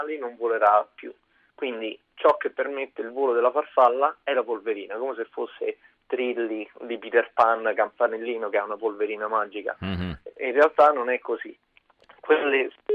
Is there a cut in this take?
no; 0 cuts

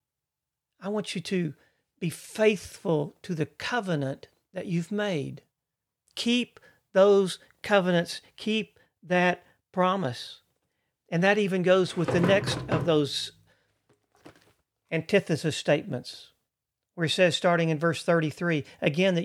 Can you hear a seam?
no; 0 cuts

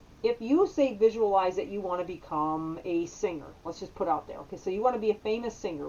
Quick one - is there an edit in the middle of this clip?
no; 0 cuts

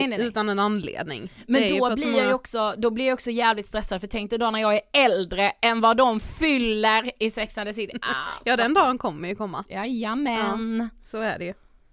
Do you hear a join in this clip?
no; 0 cuts

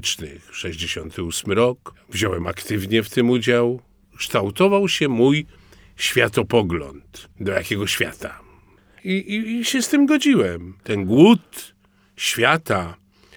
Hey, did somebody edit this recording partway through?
yes; 2 cuts; at 7.3 s, 9.0 s

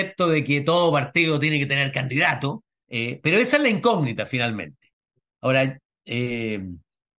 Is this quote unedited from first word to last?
no; 1 cut; at 2.8 s

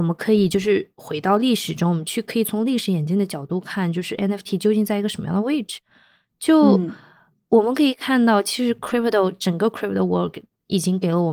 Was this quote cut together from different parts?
no; 0 cuts

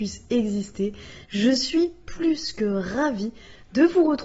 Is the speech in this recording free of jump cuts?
no; 1 cut; at 1.2 s

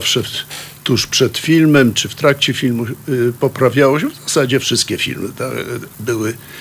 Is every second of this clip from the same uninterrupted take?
yes; 0 cuts

